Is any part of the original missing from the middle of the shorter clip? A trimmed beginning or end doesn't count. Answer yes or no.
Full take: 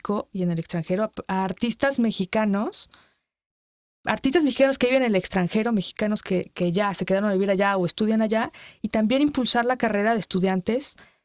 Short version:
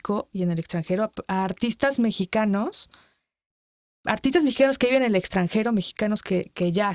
no